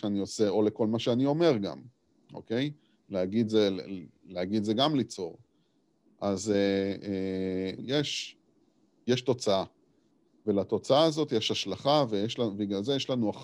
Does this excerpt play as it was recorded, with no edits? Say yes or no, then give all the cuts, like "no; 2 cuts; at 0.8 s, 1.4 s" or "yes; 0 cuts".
no; 1 cut; at 7.8 s